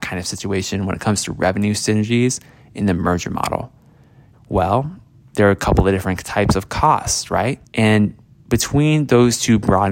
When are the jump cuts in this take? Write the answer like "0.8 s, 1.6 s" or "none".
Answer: 4.3 s, 7.6 s